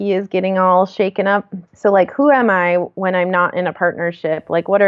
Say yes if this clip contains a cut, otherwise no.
yes